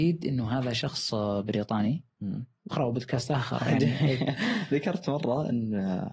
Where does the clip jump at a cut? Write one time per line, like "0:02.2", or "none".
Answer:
0:02.7